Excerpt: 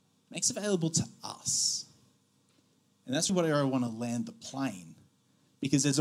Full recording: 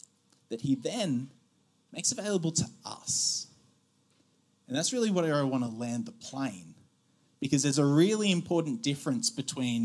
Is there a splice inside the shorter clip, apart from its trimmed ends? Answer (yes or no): yes